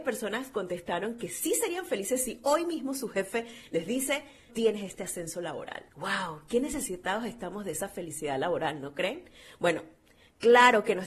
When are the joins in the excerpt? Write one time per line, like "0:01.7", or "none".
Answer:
0:04.5
0:05.9